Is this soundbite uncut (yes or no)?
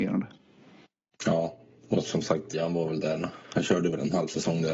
no